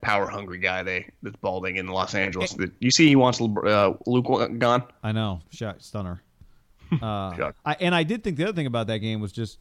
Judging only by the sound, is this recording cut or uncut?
cut